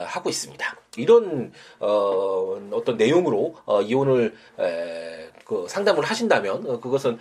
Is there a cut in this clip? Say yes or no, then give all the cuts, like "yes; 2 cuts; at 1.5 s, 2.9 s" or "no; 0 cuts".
yes; 1 cut; at 1.0 s